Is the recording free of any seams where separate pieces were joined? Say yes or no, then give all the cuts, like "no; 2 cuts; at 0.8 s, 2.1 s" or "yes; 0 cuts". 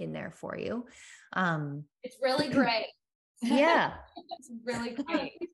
yes; 0 cuts